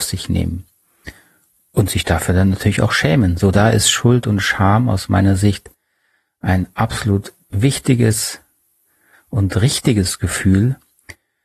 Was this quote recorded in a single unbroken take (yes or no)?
yes